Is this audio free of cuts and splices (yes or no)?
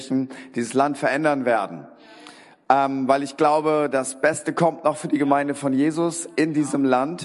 yes